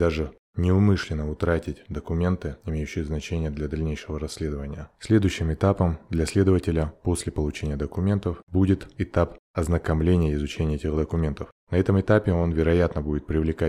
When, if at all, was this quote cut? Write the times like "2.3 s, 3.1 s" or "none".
none

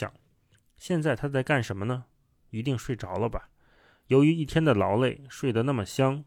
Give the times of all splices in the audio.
none

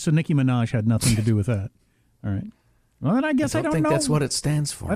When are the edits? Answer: none

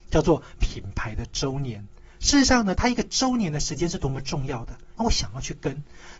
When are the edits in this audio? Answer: 2.8 s, 5.0 s

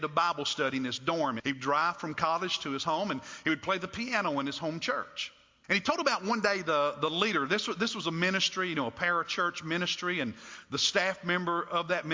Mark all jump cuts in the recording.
1.4 s, 5.6 s

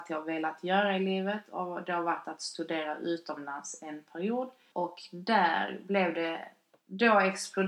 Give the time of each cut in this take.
4.7 s

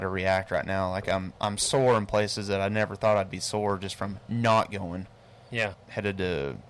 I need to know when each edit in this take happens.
5.7 s

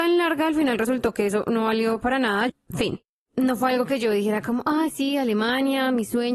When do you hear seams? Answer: 2.5 s

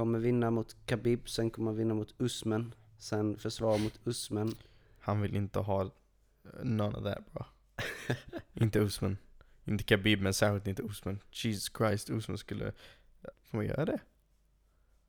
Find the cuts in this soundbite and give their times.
13.3 s

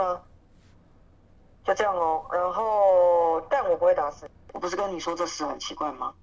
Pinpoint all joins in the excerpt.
4.5 s

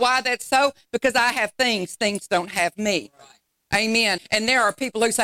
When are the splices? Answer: 4.2 s

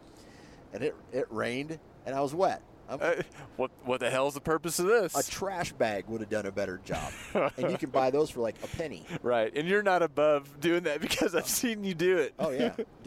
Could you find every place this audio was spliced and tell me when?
3.0 s

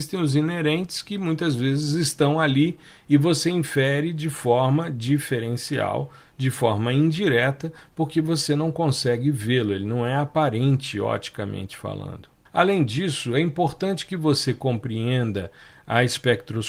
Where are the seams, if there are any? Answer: 12.5 s

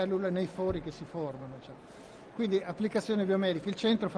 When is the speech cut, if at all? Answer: none

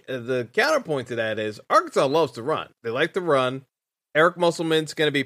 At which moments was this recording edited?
2.8 s

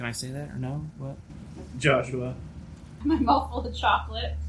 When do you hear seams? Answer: 1.3 s, 3.0 s

